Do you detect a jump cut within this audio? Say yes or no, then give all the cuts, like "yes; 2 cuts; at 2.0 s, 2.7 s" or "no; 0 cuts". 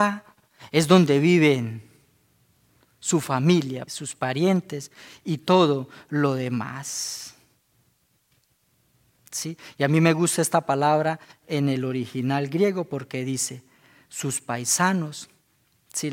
yes; 2 cuts; at 3.9 s, 9.2 s